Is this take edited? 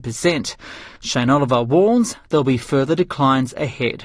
yes; 1 cut; at 1.0 s

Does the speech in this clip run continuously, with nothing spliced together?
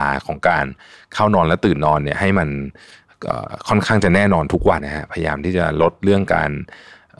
no; 1 cut; at 4.8 s

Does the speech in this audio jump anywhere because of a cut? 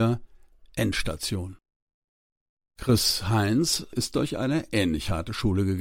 no; 0 cuts

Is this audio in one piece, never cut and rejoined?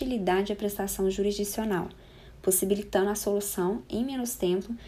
yes; 0 cuts

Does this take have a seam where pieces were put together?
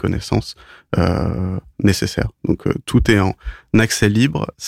no; 0 cuts

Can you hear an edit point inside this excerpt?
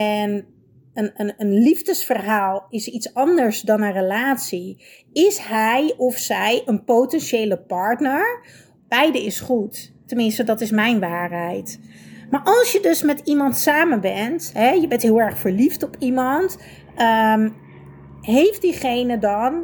yes; 1 cut; at 8.8 s

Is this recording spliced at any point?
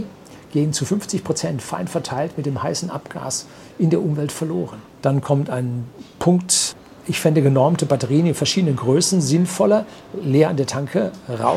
yes; 1 cut; at 4.9 s

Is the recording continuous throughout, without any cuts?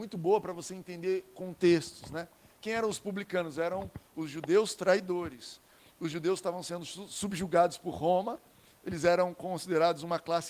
yes; 0 cuts

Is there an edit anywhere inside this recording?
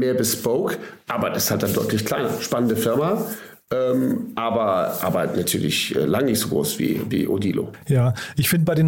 no; 0 cuts

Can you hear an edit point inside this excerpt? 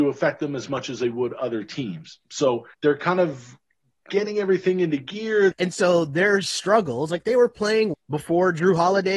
yes; 3 cuts; at 2.7 s, 5.5 s, 7.9 s

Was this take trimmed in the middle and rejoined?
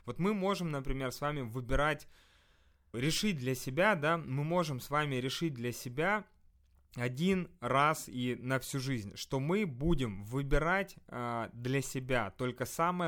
yes; 1 cut; at 2.9 s

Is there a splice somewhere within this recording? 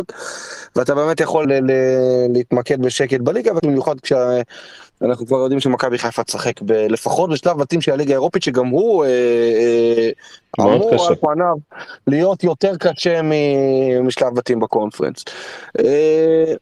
yes; 2 cuts; at 1.4 s, 3.6 s

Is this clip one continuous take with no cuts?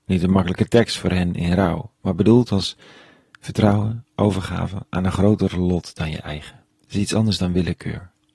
no; 1 cut; at 6.7 s

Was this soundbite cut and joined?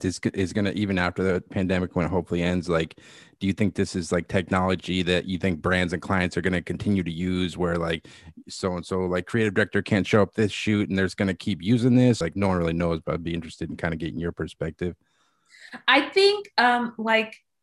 yes; 1 cut; at 12.2 s

